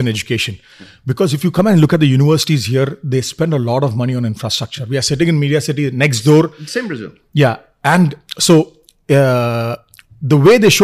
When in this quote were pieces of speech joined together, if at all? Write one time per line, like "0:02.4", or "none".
none